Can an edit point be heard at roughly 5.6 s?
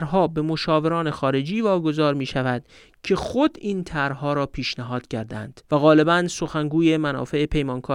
yes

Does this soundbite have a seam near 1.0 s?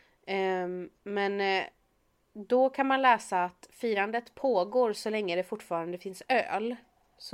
yes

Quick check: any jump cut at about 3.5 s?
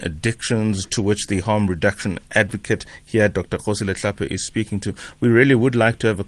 no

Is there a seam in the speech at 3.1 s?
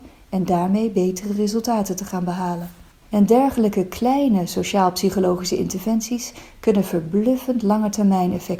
yes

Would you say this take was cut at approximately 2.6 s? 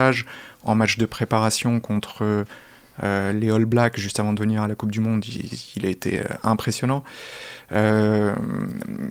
no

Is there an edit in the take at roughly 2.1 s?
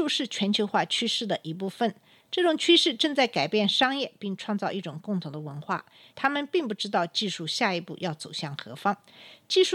no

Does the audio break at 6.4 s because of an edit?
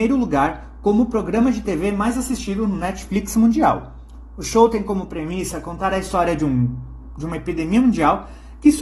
no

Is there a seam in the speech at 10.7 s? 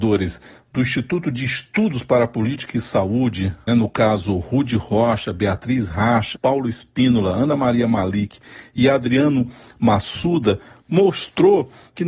no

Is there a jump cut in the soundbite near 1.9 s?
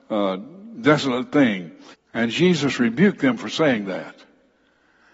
yes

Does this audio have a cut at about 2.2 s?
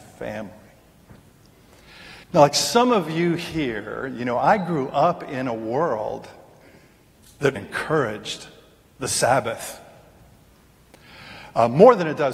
yes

